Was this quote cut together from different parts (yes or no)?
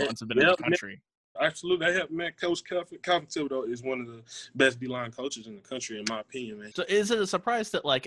yes